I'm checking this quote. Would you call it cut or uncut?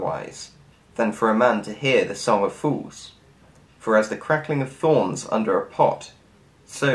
uncut